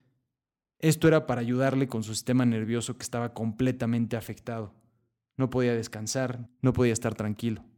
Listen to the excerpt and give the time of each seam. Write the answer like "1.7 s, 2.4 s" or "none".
6.5 s